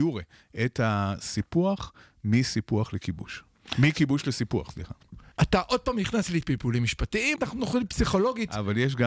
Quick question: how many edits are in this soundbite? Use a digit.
2